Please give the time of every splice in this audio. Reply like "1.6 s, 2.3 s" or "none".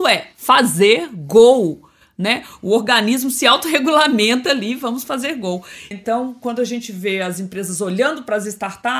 5.9 s